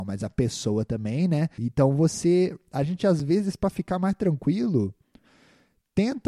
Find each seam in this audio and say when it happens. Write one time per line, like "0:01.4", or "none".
0:01.6